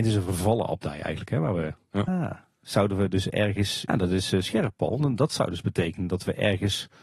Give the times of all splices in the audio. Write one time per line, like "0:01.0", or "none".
0:02.1
0:03.9